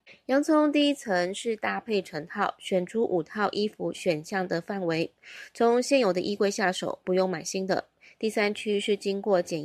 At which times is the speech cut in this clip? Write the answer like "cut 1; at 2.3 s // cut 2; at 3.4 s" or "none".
cut 1; at 8.2 s